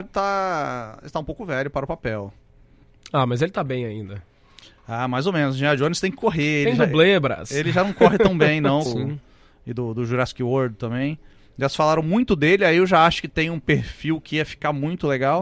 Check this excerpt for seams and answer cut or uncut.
cut